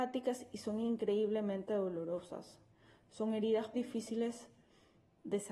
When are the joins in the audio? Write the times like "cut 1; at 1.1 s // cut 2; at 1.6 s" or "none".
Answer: cut 1; at 3.7 s

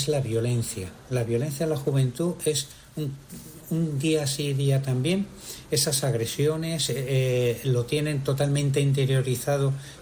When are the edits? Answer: none

